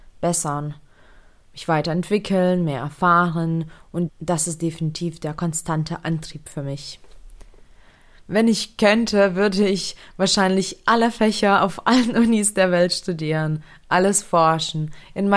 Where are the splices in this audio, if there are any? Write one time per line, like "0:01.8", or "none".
0:04.1